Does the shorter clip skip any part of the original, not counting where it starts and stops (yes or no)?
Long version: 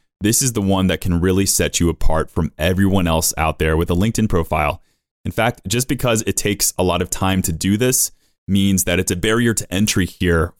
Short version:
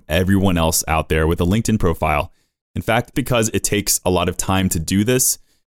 yes